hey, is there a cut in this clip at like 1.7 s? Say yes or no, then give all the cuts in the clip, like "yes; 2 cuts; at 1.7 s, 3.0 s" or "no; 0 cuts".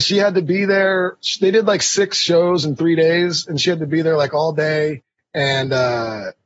no; 0 cuts